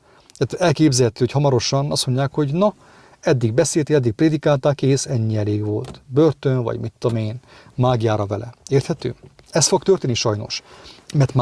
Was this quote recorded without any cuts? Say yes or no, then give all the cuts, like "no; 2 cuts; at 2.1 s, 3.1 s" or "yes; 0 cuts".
yes; 0 cuts